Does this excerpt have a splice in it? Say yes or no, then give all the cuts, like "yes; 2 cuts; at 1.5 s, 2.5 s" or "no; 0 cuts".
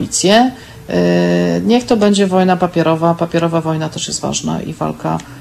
no; 0 cuts